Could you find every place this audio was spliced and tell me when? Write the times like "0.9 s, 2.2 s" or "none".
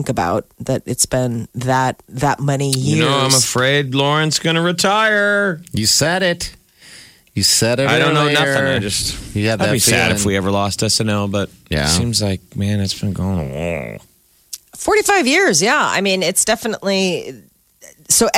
none